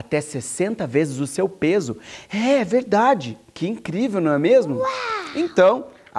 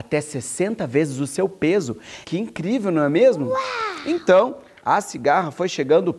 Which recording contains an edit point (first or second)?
second